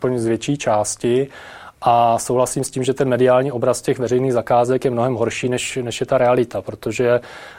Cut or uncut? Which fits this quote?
uncut